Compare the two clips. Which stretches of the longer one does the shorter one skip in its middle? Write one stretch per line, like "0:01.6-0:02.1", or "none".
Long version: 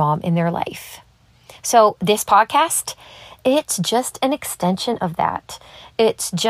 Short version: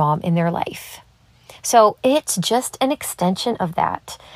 0:02.0-0:03.4